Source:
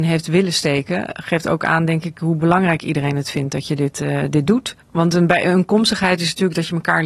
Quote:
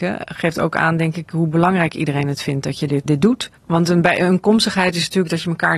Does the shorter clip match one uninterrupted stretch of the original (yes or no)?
no